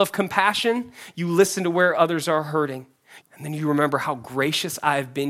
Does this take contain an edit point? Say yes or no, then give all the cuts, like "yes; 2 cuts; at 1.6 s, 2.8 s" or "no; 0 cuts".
yes; 1 cut; at 3.2 s